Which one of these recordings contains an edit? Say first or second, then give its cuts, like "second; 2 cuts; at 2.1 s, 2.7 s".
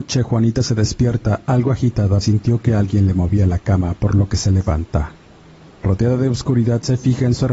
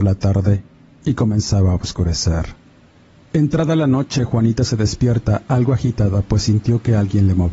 first; 1 cut; at 2.2 s